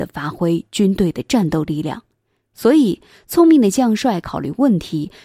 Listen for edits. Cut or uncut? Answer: uncut